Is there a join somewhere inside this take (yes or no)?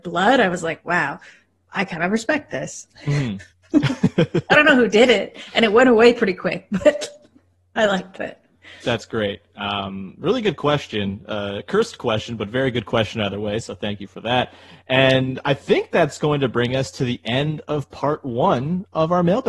no